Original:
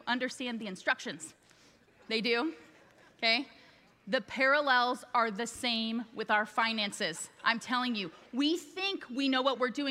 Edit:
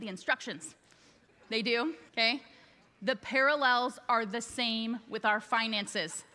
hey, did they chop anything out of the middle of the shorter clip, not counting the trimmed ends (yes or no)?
yes